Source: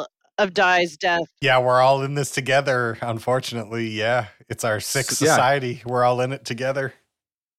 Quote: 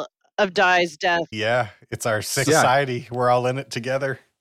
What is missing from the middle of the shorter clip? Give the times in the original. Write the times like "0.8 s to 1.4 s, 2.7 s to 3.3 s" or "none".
1.3 s to 3.9 s, 5.0 s to 5.2 s